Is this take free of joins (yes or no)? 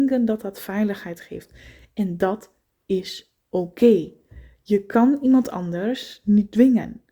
yes